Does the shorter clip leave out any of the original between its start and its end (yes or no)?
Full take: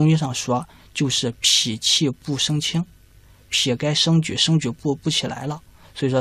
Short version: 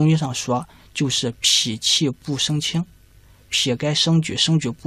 no